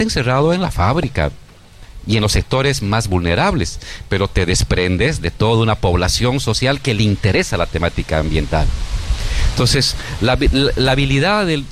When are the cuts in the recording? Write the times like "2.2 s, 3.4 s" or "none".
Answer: none